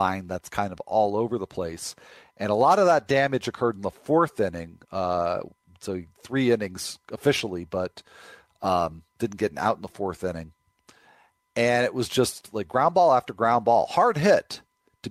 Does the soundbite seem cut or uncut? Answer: uncut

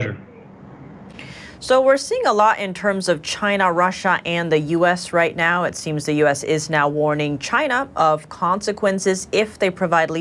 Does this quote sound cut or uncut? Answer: uncut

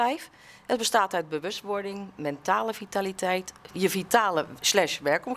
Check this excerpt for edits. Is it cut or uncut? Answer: cut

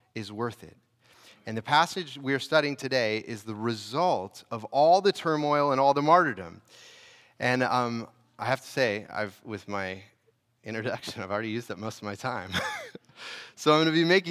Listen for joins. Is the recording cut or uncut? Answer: uncut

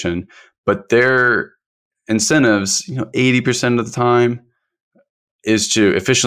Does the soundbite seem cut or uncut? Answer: uncut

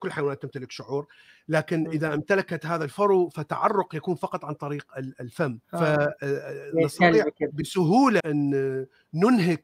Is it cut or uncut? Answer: cut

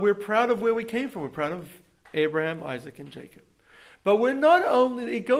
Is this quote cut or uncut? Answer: uncut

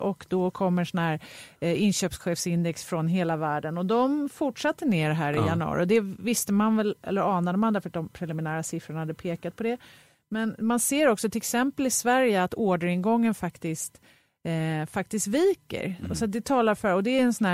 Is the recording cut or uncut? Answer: uncut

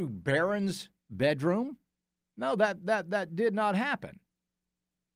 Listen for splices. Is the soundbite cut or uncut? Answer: cut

